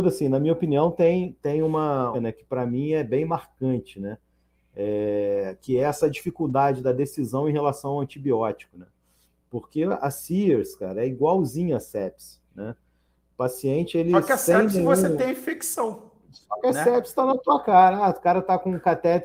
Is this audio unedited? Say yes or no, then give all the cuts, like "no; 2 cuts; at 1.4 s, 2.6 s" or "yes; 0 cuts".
no; 1 cut; at 2.1 s